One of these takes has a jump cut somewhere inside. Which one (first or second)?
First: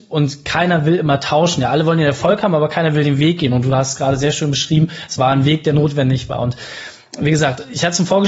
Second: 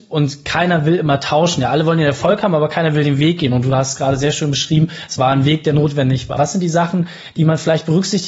second